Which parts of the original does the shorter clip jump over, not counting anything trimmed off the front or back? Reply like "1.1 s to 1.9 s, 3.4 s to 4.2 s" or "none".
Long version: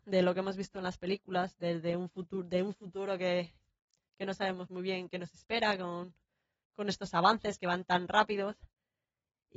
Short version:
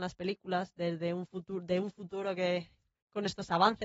3.8 s to 6.6 s